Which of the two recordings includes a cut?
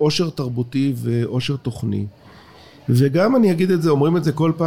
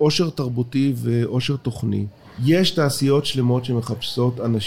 second; 1 cut; at 2.4 s

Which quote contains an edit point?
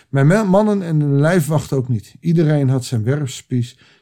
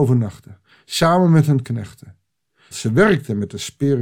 second; 1 cut; at 2.7 s

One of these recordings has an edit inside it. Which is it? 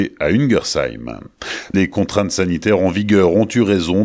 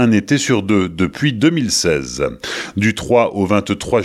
first; 1 cut; at 1.7 s

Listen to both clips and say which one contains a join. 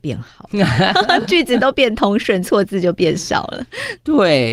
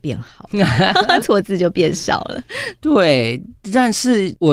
second; 1 cut; at 1.2 s

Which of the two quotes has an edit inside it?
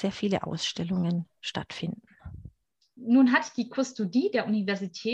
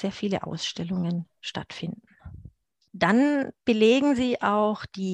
second; 1 cut; at 2.9 s

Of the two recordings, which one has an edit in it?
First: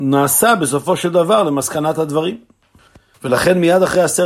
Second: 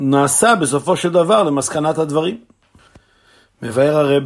first; 1 cut; at 3.1 s

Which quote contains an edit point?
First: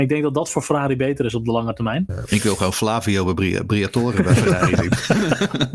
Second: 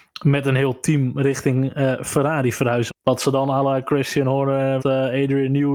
second; 2 cuts; at 2.9 s, 4.8 s

